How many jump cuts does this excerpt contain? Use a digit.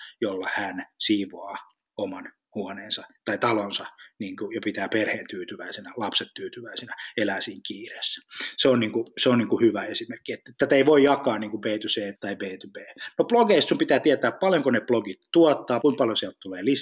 2